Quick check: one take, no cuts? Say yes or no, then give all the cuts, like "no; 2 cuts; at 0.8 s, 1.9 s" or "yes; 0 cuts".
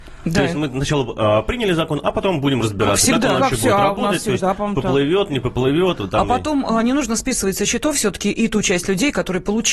yes; 0 cuts